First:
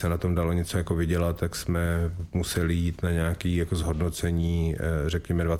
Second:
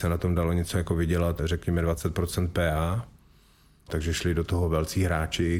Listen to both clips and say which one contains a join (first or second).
second